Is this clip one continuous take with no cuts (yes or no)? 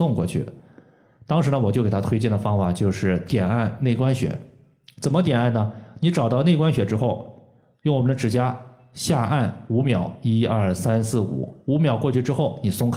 yes